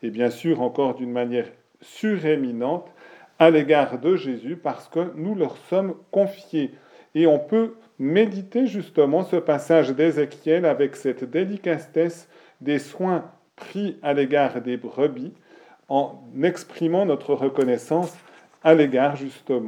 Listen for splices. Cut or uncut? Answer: uncut